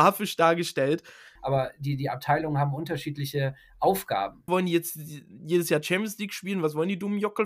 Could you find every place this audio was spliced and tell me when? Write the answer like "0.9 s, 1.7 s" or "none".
1.4 s, 4.5 s

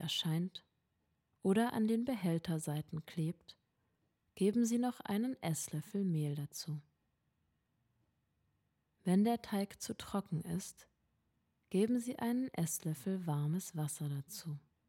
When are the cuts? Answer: none

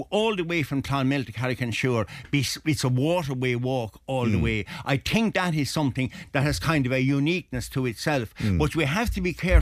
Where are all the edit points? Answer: none

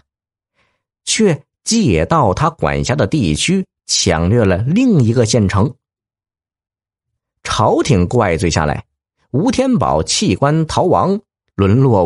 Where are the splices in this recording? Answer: none

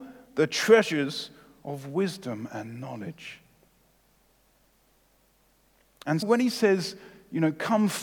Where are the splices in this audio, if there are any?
6.2 s

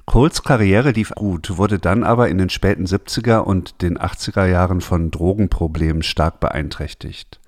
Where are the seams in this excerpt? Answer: 1.1 s

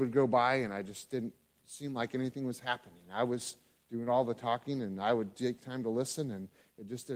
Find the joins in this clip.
none

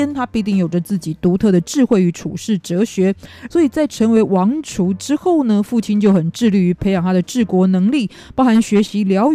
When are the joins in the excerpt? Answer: 3.5 s

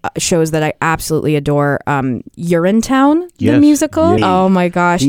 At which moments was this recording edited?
4.2 s

